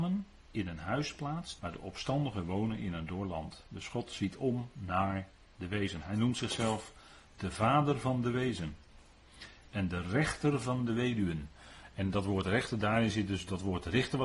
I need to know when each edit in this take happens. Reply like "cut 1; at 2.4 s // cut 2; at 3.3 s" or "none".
cut 1; at 1.6 s